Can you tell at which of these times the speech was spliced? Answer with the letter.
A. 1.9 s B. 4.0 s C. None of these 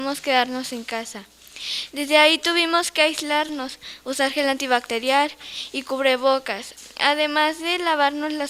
A